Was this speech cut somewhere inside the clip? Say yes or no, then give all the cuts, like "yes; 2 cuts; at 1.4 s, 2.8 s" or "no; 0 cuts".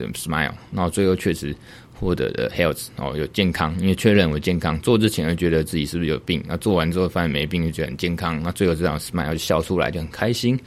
no; 0 cuts